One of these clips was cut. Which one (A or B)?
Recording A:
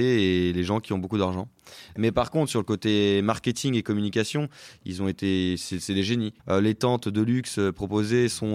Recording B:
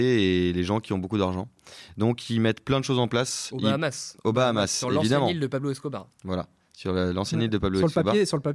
A